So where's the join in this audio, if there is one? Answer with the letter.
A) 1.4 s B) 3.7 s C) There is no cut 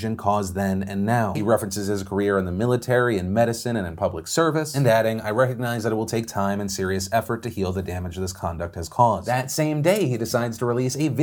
A